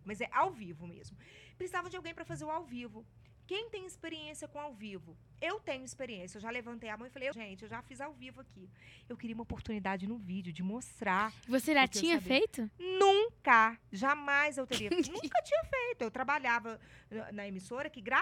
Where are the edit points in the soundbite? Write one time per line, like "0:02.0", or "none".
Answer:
0:07.3

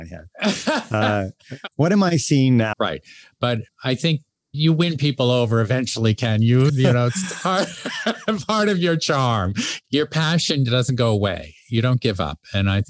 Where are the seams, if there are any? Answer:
0:02.7
0:06.7

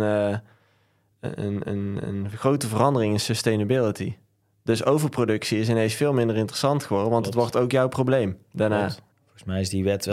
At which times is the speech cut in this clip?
0:09.1

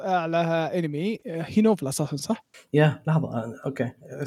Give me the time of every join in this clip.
none

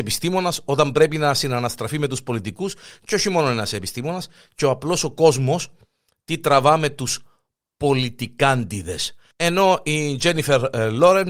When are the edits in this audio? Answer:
0:09.3

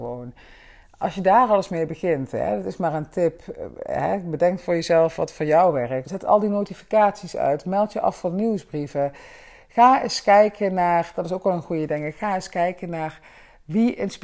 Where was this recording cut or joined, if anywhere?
0:06.1

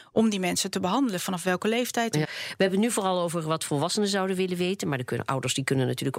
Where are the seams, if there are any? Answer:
0:02.2

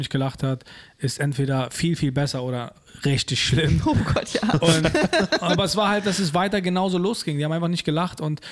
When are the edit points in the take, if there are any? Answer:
none

